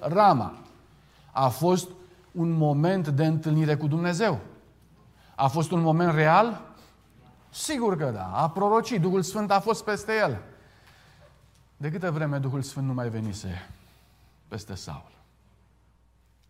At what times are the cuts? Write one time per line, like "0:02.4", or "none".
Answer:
none